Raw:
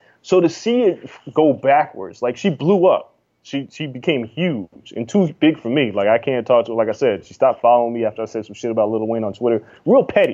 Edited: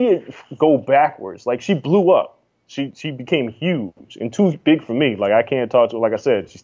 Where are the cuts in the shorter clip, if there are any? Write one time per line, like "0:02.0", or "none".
none